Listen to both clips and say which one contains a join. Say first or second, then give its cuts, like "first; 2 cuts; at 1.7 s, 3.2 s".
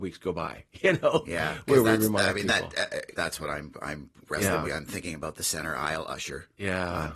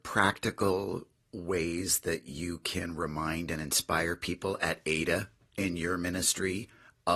first; 2 cuts; at 3.1 s, 4.7 s